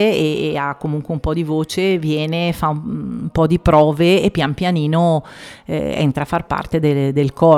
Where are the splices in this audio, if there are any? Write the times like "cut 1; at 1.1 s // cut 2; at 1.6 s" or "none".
none